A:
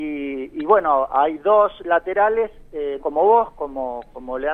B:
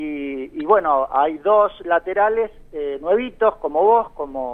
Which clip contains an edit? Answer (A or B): A